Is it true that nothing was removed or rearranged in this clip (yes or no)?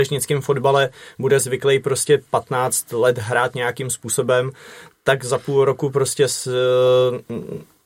yes